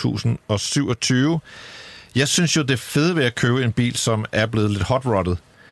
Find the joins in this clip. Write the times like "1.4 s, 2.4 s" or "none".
none

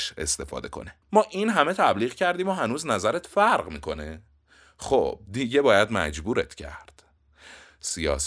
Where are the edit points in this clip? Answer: 1.0 s

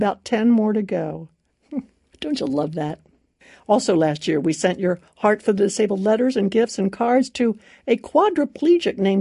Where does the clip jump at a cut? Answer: 1.5 s

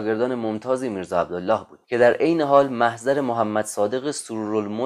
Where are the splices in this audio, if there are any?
1.8 s

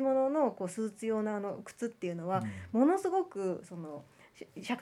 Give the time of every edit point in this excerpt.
none

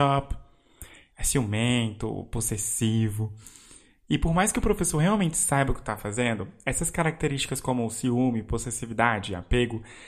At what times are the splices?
1.1 s

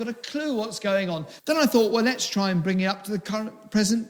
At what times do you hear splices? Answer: 1.4 s

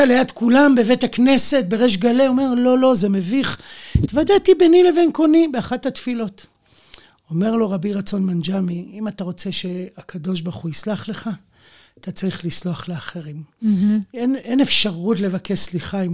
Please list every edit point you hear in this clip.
none

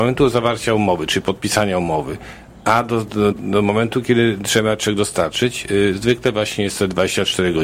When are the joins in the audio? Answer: 3.3 s

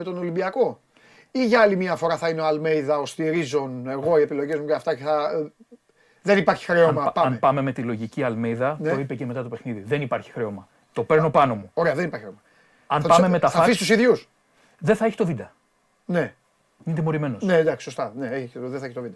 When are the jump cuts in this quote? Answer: none

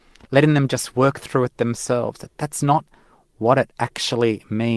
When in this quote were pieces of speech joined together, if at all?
none

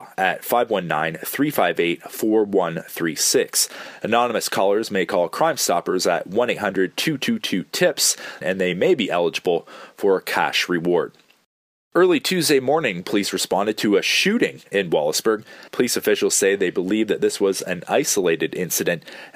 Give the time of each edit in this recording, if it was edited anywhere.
8.4 s, 15.7 s

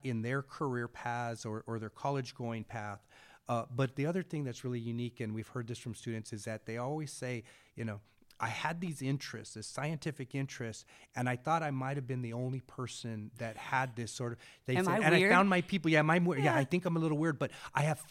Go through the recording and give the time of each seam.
none

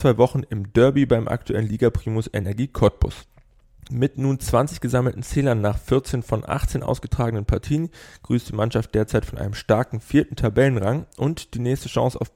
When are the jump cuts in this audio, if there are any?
3.9 s

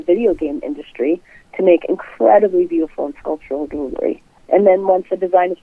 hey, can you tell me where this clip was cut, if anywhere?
4.4 s

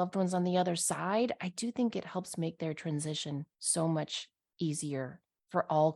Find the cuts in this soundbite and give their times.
3.5 s

